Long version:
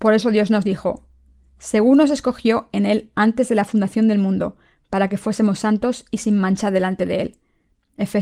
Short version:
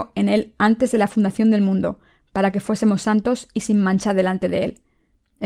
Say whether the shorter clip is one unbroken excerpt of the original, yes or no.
yes